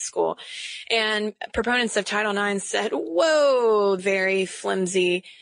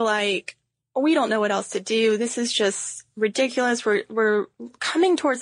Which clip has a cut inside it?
first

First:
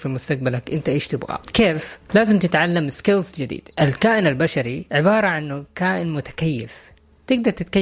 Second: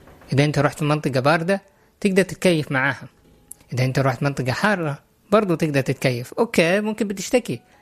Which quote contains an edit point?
first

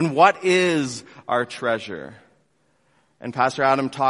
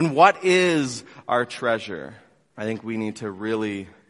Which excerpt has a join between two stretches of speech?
second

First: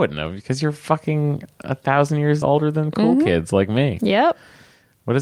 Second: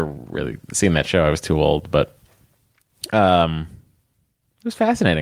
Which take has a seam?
first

